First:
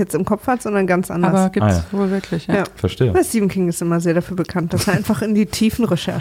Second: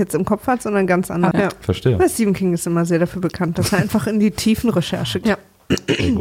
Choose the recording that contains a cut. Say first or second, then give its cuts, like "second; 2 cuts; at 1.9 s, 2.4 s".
second; 2 cuts; at 1.3 s, 5.2 s